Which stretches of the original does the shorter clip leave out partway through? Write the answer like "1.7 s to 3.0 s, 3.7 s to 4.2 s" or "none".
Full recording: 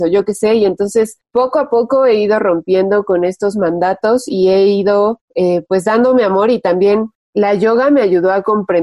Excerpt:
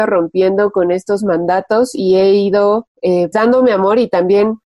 5.7 s to 5.8 s